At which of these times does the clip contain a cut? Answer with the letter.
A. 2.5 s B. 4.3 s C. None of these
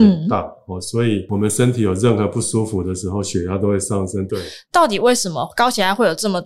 B